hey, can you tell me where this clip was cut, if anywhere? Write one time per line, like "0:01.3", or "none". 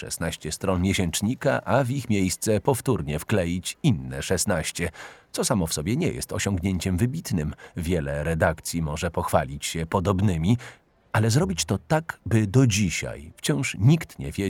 0:13.3

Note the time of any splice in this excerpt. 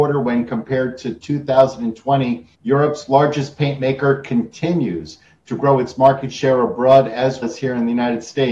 0:02.5
0:07.4

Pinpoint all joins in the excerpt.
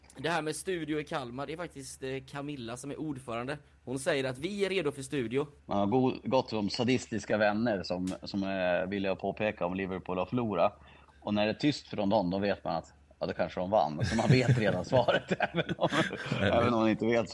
0:05.6

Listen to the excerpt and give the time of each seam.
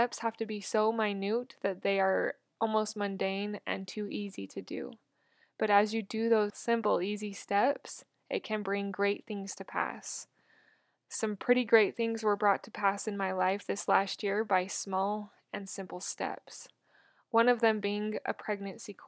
0:06.5

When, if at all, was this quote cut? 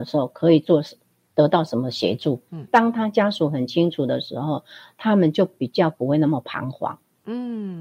0:02.7

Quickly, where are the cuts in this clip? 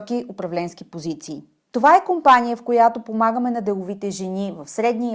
0:01.7

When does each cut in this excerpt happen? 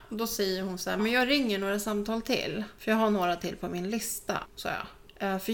0:01.0
0:04.4

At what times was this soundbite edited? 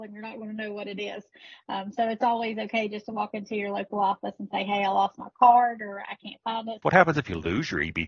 0:06.8

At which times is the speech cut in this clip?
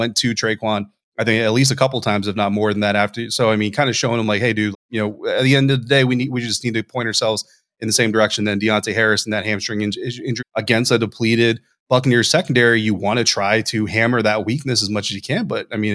0:04.7
0:10.4

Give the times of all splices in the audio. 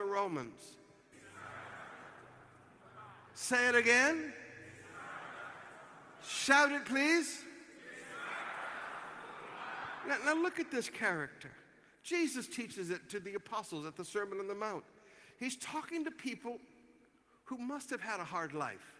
0:01.1

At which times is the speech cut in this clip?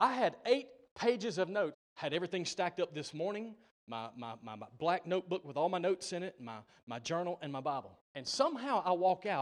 0:01.7
0:08.1

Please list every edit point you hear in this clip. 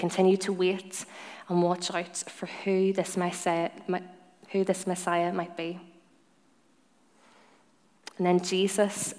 none

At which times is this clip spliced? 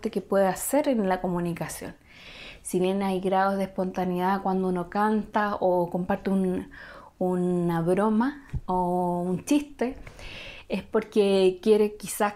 none

